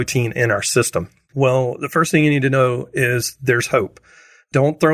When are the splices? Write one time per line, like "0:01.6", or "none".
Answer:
0:01.3

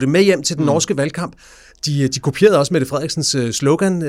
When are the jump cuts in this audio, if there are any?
none

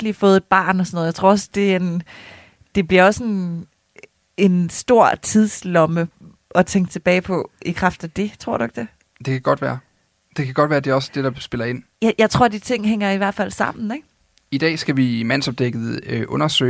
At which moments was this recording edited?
none

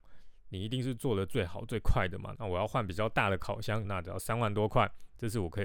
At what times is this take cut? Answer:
0:02.3
0:03.8

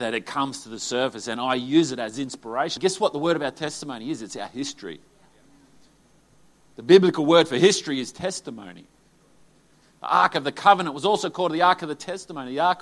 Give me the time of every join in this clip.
0:02.8

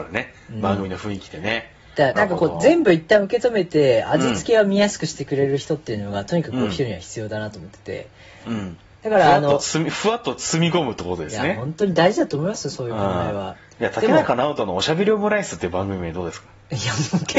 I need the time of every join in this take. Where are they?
0:02.2

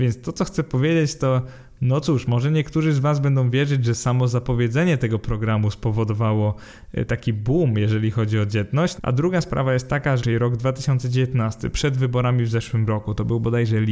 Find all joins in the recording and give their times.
0:09.0
0:10.2

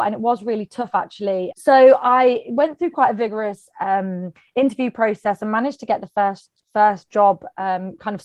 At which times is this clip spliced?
0:01.5

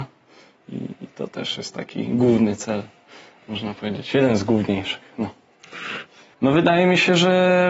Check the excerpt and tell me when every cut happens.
0:06.3

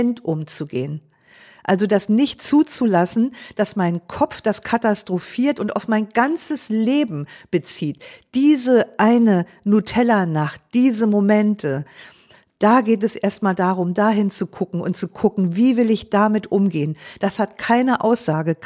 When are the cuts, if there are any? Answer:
none

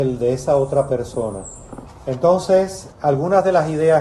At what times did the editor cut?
0:01.9
0:02.9

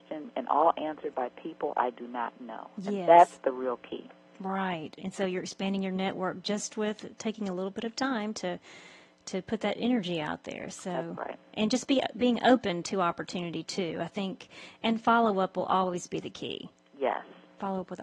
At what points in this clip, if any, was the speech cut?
none

